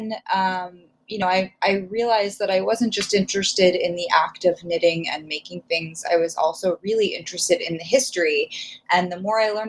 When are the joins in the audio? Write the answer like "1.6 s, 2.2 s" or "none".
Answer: none